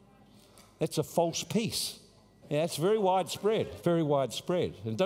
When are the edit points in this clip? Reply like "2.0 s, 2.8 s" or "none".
2.4 s, 3.8 s